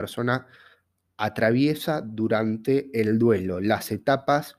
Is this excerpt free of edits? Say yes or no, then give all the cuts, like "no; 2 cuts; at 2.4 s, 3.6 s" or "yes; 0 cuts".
yes; 0 cuts